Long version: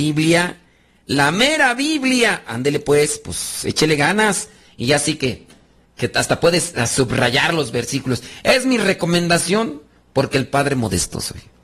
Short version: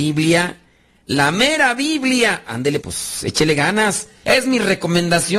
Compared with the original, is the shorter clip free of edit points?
no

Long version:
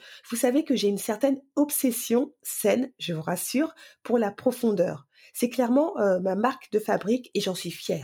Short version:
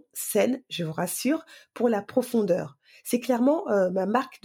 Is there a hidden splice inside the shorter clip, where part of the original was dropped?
no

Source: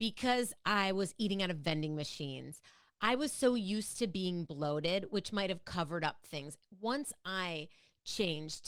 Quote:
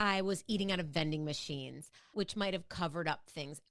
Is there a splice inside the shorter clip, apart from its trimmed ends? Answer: yes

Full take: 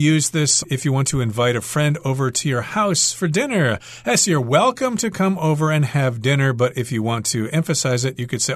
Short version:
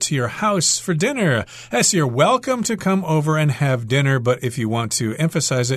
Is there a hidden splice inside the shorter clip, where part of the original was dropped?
no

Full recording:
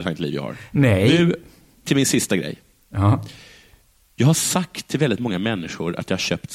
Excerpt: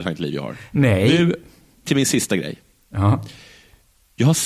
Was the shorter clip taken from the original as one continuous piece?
yes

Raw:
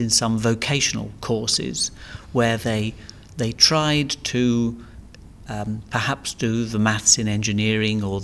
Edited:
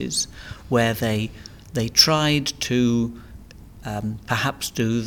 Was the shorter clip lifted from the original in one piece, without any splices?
yes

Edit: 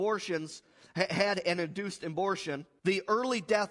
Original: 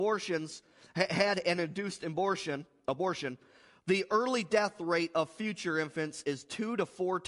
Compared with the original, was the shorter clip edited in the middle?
yes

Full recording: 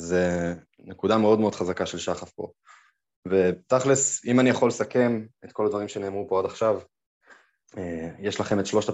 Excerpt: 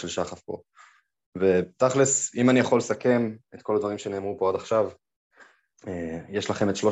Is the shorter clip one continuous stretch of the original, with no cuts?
yes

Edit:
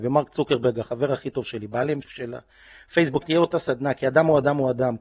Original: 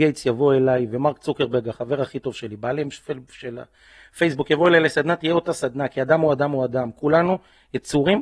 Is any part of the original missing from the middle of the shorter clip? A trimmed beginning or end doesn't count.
yes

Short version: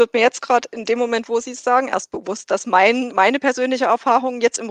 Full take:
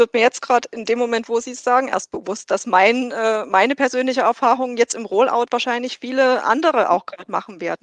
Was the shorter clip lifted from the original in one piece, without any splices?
no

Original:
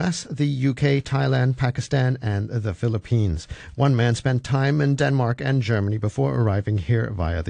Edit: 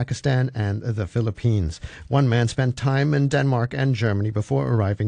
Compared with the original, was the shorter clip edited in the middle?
no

